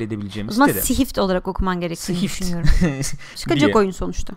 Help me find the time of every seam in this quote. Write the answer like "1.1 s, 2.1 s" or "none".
3.3 s